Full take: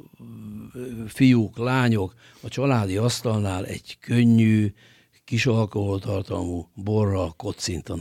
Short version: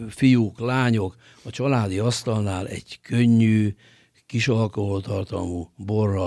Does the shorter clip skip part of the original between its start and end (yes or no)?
no